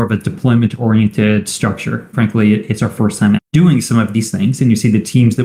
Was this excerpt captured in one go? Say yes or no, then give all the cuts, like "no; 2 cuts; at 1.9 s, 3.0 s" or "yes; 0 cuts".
no; 2 cuts; at 2.1 s, 3.3 s